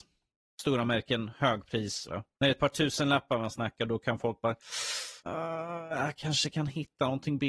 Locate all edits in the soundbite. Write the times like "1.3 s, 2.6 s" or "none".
2.1 s